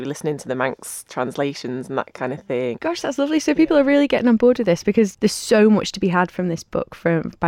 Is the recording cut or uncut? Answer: cut